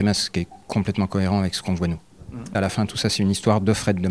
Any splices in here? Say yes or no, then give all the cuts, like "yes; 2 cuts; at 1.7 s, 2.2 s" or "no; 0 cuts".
yes; 1 cut; at 2.5 s